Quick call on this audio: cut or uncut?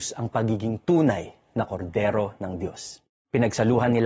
cut